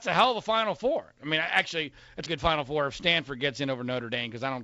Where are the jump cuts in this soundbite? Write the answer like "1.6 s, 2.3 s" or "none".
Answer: 2.3 s